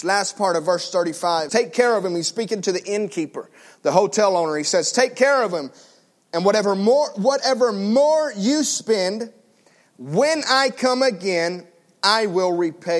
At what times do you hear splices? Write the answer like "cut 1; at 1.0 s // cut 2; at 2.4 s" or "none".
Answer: cut 1; at 1.5 s